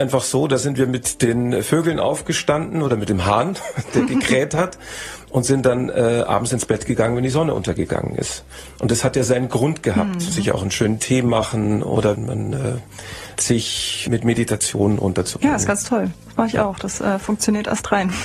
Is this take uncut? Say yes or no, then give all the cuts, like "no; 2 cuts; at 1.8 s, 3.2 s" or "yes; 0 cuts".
no; 2 cuts; at 10.3 s, 13.3 s